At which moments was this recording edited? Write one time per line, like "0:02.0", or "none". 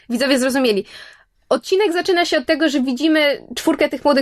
none